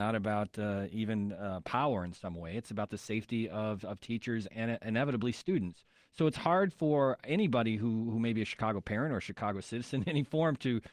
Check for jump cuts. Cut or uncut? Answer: uncut